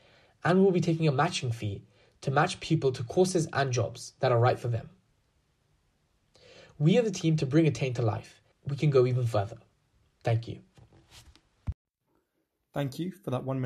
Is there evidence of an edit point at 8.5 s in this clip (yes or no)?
yes